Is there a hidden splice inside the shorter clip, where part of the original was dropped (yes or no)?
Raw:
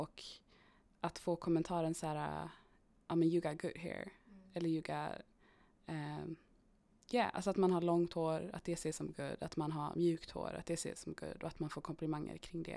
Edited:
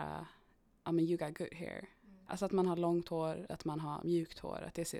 yes